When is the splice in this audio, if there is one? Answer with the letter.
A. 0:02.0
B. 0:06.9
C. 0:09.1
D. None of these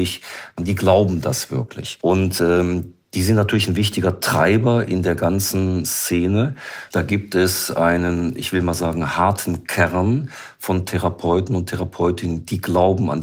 B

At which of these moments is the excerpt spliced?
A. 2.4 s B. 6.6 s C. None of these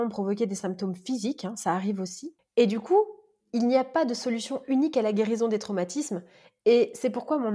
C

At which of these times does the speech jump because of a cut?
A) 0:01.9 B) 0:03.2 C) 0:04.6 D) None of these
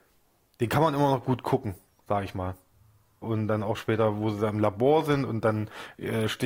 B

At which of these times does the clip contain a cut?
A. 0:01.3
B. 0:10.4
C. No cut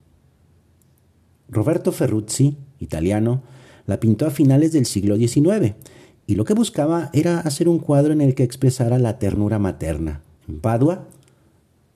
B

